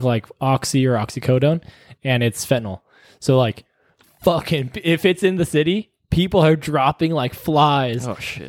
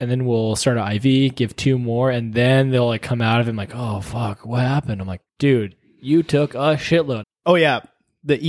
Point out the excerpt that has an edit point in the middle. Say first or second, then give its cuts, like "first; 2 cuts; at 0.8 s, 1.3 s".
second; 2 cuts; at 5.3 s, 7.2 s